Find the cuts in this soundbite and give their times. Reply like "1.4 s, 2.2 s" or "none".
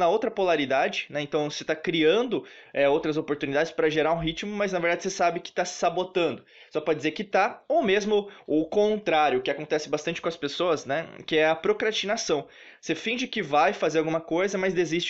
none